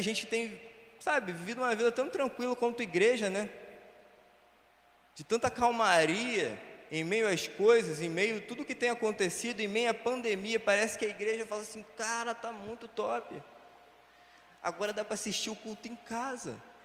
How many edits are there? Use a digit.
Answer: 0